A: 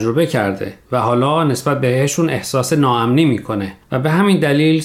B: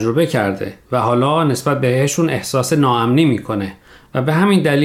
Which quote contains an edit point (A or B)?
A